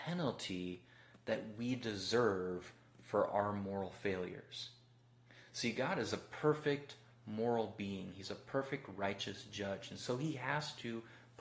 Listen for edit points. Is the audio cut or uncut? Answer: uncut